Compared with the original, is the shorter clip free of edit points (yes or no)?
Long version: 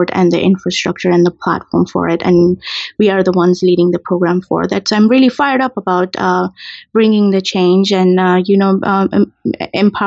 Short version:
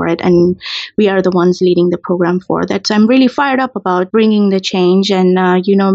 no